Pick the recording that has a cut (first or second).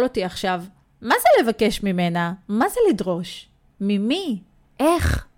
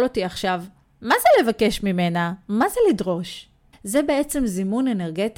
second